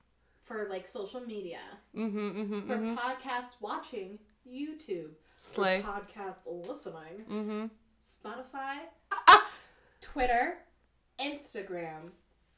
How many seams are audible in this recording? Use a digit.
1